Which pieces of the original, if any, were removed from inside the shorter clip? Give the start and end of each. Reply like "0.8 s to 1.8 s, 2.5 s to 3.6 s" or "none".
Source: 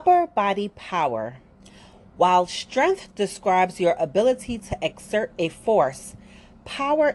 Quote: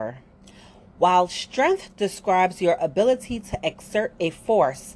none